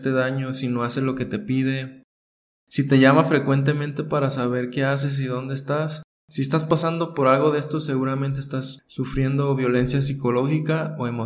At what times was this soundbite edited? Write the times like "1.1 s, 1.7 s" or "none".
none